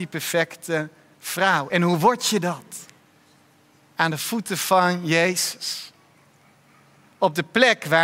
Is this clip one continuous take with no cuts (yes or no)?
yes